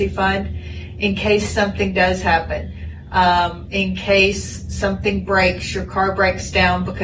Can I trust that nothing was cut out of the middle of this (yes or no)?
yes